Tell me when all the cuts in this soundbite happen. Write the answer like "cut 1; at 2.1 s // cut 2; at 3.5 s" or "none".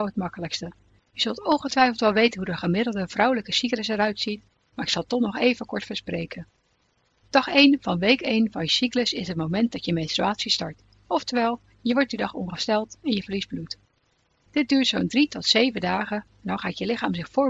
cut 1; at 1.0 s